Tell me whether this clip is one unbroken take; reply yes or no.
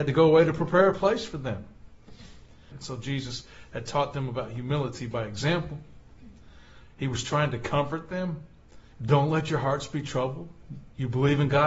no